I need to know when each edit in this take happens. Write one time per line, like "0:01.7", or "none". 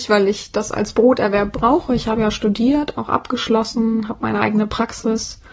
none